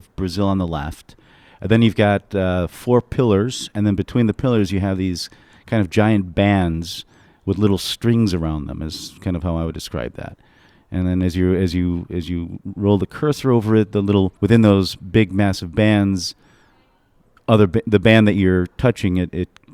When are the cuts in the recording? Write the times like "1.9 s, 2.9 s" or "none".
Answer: 14.4 s